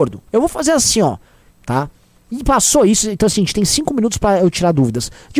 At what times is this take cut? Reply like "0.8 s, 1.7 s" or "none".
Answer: 1.5 s